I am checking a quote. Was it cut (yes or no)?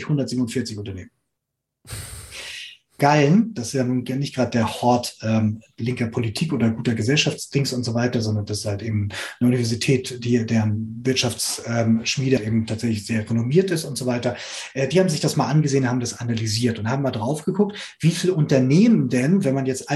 yes